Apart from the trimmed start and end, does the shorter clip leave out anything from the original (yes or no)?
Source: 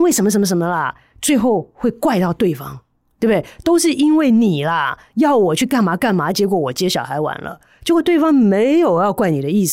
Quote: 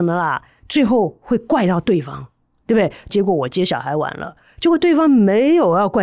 yes